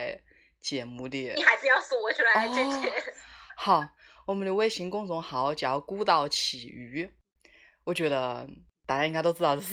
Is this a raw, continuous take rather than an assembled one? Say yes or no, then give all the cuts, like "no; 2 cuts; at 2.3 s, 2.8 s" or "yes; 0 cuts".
yes; 0 cuts